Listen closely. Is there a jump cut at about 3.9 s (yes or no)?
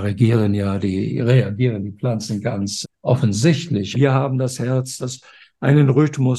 yes